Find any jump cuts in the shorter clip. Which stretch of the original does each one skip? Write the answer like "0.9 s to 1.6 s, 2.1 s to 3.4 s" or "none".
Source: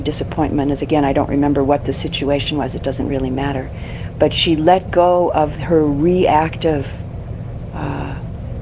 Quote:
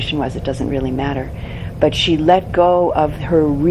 none